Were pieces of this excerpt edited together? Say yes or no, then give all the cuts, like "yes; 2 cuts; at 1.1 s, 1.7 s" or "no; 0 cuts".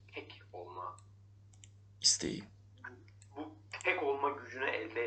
no; 0 cuts